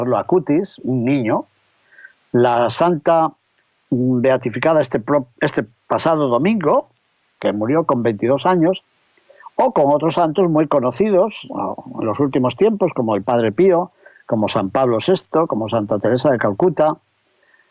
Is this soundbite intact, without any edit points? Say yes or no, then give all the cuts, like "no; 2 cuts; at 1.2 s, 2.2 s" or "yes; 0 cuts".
yes; 0 cuts